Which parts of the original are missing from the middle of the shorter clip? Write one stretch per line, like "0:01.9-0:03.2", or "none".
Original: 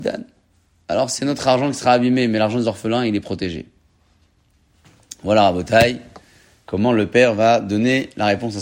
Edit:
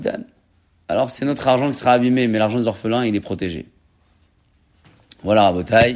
none